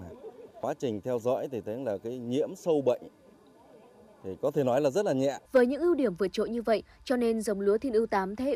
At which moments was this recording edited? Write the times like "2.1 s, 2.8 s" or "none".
5.4 s